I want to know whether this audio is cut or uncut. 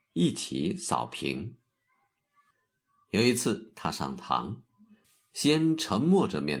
uncut